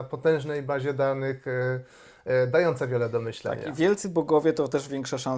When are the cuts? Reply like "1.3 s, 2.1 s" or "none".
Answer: none